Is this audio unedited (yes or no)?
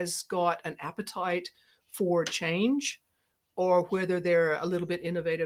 yes